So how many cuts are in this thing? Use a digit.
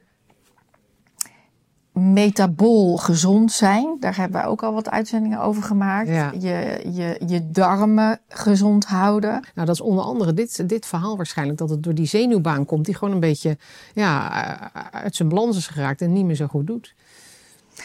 1